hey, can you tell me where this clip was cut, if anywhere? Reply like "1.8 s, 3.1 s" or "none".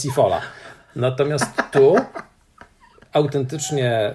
none

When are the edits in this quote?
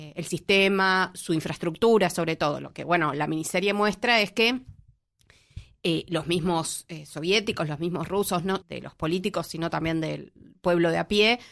8.6 s

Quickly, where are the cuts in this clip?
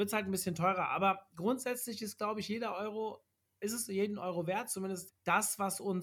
5.1 s

